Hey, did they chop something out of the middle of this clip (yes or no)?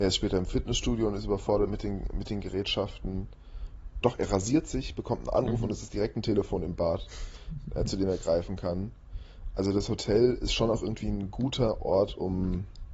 yes